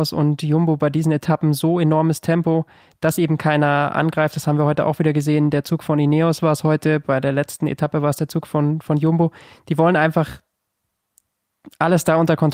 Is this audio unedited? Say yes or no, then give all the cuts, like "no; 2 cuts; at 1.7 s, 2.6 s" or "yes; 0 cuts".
yes; 0 cuts